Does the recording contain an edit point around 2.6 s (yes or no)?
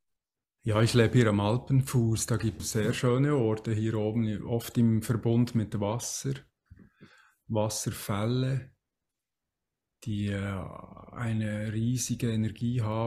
yes